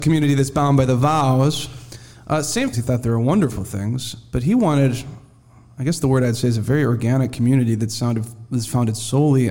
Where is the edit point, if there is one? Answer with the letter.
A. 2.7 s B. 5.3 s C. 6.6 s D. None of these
A